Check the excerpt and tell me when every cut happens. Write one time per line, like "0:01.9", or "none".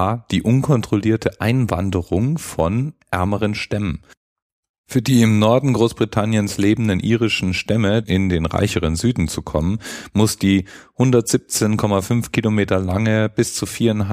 0:08.0